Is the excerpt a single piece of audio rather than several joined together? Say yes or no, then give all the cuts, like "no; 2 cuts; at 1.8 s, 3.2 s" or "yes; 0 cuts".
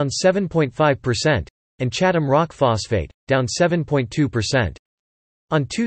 yes; 0 cuts